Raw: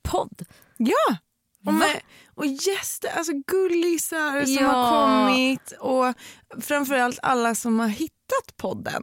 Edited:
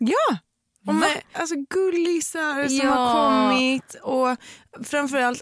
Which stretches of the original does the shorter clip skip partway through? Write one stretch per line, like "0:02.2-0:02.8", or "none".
0:02.1-0:03.1